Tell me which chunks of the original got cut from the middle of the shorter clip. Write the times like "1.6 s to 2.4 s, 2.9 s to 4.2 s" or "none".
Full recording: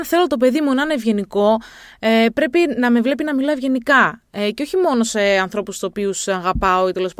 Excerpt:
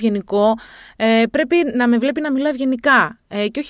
none